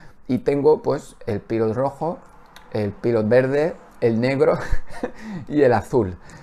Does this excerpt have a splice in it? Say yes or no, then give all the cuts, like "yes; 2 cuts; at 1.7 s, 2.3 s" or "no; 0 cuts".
yes; 1 cut; at 3.9 s